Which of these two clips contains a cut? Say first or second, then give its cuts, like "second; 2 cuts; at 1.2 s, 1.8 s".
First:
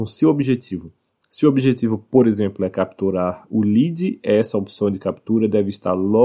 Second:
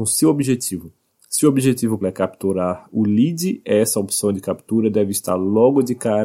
second; 1 cut; at 2.0 s